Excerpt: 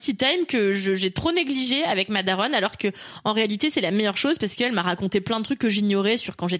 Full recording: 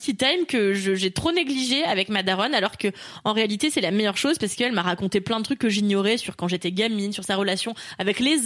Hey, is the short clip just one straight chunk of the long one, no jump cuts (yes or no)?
yes